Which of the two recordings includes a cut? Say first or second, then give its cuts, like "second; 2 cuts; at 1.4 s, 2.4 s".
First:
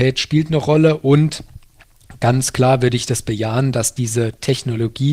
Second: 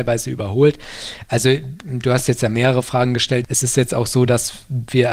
second; 1 cut; at 3.4 s